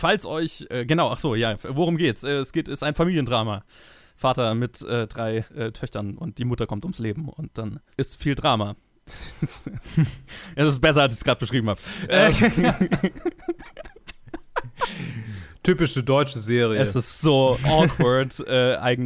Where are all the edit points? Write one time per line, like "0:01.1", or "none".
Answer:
none